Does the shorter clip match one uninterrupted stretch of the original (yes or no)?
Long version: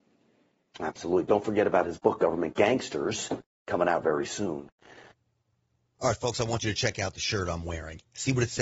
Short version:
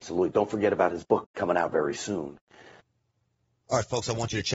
no